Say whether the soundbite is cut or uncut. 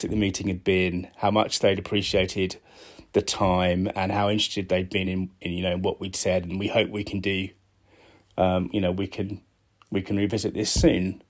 uncut